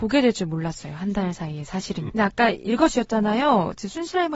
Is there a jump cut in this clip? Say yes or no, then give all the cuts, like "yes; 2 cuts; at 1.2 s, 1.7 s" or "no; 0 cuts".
yes; 1 cut; at 2.1 s